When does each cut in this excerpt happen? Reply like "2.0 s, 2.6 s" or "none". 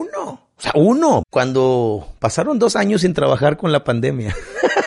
1.2 s

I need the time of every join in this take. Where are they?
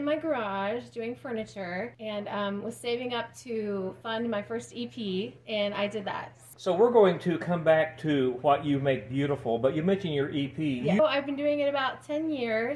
6.5 s, 11.0 s

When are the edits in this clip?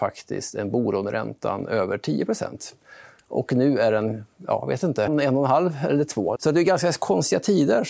5.1 s, 6.4 s

